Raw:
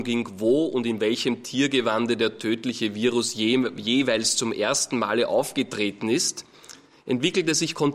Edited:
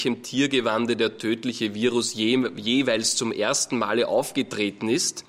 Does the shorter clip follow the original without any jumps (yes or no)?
yes